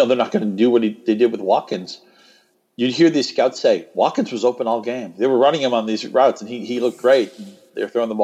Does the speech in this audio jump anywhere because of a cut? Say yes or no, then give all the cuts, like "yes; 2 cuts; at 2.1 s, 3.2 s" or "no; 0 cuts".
no; 0 cuts